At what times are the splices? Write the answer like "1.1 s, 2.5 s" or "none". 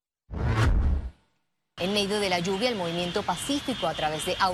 1.8 s